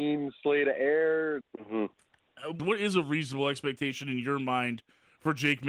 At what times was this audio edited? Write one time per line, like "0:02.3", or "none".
0:01.4
0:02.6